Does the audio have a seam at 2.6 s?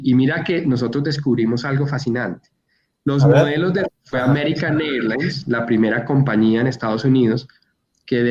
no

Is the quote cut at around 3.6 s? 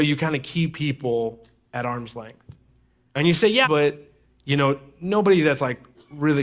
yes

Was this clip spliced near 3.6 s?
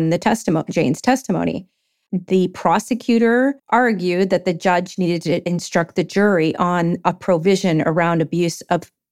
yes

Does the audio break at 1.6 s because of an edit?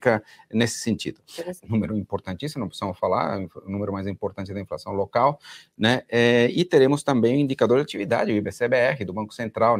yes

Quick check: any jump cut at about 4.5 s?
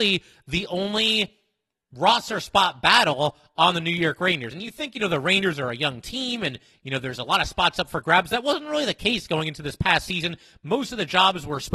no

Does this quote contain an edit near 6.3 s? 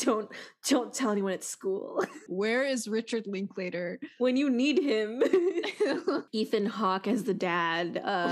yes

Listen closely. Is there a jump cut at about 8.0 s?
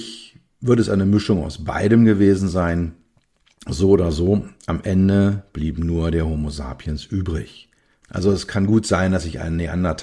yes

